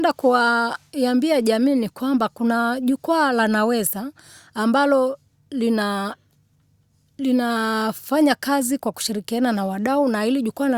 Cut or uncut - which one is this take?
uncut